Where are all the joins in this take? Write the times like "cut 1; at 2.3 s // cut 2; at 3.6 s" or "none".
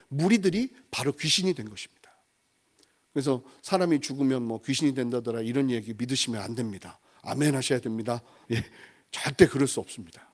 cut 1; at 8.5 s